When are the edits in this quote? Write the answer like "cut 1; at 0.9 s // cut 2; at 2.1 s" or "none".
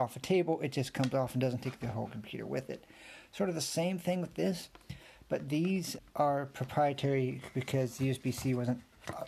cut 1; at 6.0 s